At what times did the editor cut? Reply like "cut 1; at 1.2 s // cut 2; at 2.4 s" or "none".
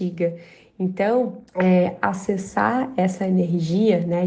cut 1; at 1.5 s